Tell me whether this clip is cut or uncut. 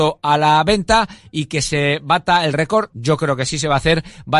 uncut